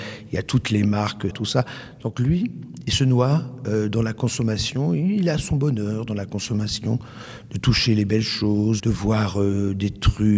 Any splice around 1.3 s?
yes; 2 cuts; at 1.3 s, 8.8 s

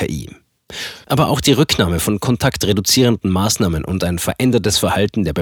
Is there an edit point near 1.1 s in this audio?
yes; 1 cut; at 1.1 s

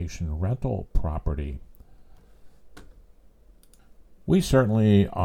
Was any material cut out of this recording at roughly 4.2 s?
no; 0 cuts

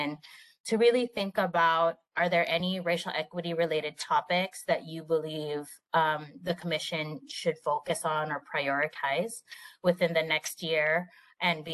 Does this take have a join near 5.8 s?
no; 0 cuts

